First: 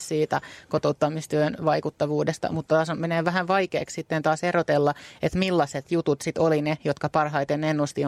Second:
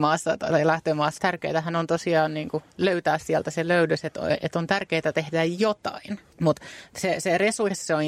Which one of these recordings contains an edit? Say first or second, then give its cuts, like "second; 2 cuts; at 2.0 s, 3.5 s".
second; 2 cuts; at 1.2 s, 6.3 s